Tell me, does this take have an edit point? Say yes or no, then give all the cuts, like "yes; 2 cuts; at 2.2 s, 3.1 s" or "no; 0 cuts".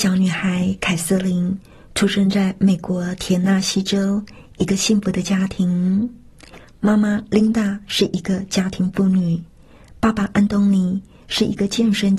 no; 0 cuts